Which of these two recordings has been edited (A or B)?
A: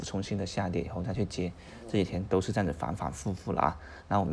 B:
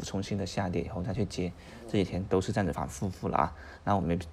B